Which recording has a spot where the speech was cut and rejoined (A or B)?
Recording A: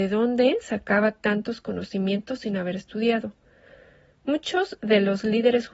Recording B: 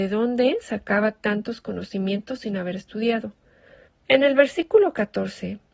B